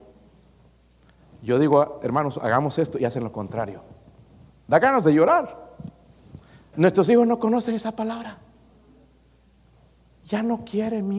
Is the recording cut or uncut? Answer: cut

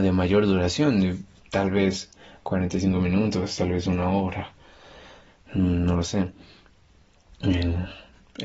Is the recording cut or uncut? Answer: cut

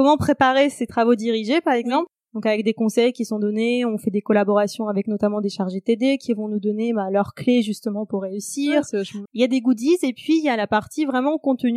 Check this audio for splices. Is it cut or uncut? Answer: cut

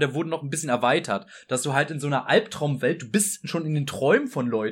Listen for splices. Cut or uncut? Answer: uncut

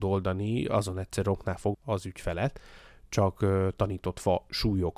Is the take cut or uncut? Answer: cut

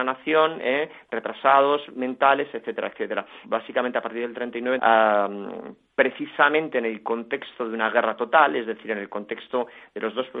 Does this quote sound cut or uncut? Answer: cut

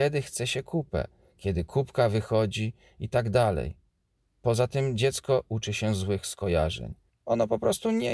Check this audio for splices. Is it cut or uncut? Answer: cut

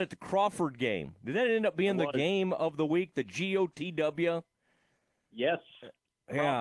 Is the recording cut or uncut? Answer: uncut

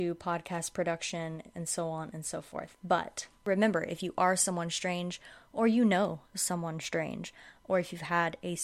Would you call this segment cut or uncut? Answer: uncut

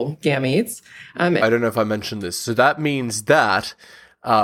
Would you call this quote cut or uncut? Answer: cut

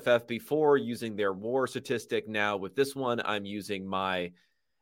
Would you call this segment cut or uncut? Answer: uncut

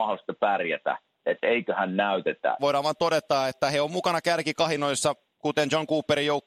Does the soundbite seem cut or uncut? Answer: cut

